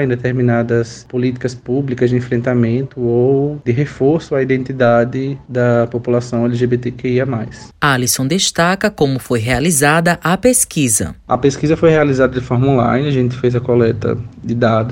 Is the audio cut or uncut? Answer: uncut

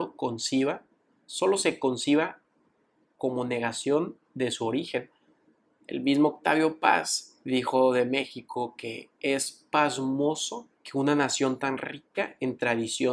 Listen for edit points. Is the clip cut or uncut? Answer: cut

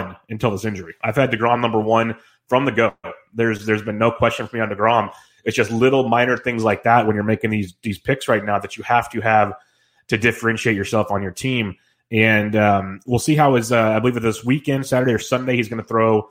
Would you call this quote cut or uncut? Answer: uncut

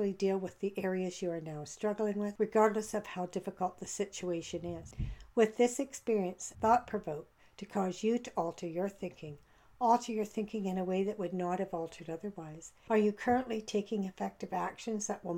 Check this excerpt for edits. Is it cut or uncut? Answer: cut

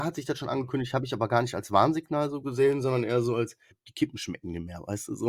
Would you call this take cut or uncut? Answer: cut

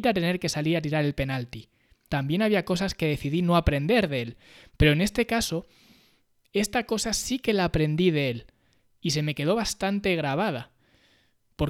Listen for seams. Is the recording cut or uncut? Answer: cut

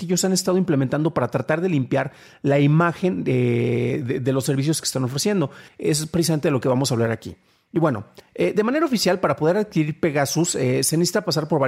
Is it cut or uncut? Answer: cut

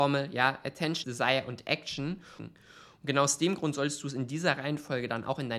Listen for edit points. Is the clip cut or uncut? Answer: cut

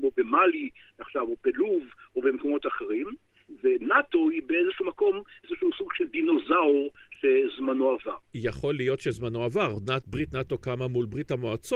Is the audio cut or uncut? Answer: uncut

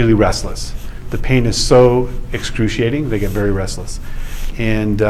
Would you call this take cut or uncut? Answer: uncut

